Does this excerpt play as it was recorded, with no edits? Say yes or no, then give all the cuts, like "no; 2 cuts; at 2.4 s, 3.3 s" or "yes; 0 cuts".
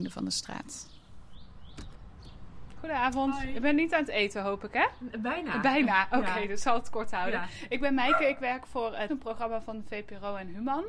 no; 1 cut; at 9.1 s